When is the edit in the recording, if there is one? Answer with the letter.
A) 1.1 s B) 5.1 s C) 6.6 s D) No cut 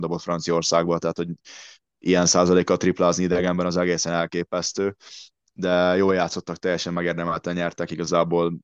D